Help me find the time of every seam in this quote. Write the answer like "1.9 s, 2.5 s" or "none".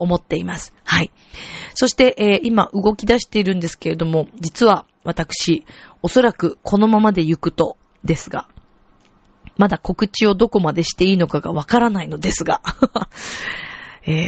none

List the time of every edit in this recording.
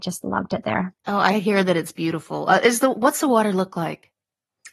1.0 s

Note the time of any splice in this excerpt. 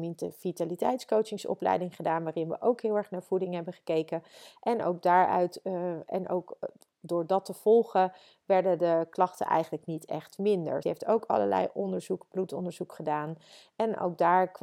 10.8 s

